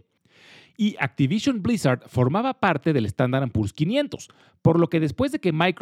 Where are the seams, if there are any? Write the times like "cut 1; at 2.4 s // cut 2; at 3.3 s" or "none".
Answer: none